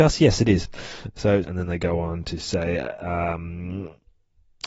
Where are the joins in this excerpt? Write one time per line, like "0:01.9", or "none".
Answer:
0:01.4